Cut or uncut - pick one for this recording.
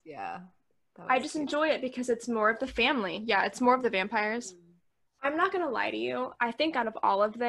cut